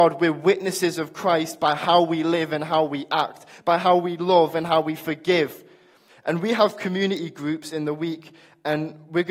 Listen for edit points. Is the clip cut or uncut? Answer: cut